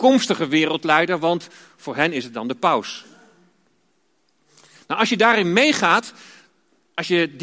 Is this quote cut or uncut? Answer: uncut